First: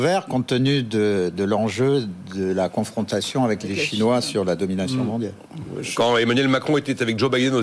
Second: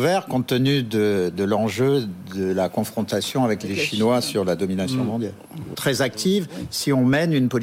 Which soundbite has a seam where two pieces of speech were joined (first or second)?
second